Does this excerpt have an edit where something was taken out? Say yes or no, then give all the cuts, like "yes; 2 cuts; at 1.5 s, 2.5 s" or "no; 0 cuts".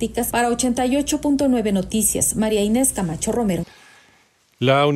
no; 0 cuts